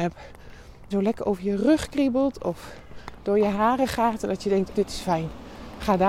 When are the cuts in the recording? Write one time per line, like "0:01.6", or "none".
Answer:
0:00.9
0:04.7

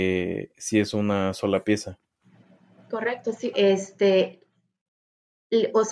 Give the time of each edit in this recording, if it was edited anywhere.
0:03.5

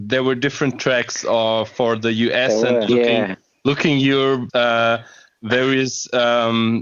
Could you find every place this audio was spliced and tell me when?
0:02.9
0:04.5

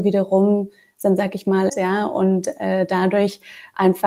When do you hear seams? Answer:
0:01.7

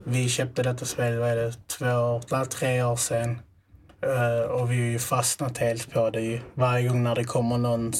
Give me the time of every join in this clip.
none

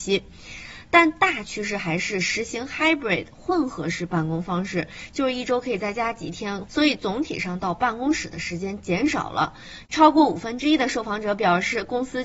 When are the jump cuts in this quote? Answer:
0:06.7
0:09.9

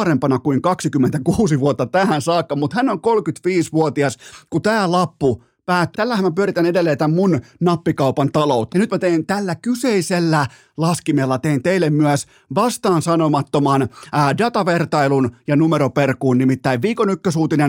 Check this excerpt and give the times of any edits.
0:05.9
0:08.7

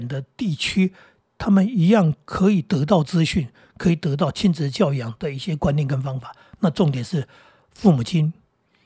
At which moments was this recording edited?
none

